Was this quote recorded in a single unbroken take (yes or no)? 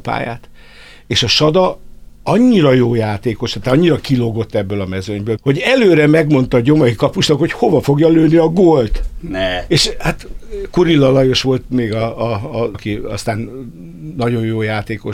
no